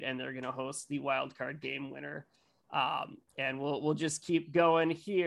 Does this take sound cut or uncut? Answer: uncut